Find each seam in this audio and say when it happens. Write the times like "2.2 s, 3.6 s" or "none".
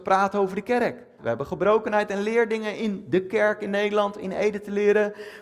1.2 s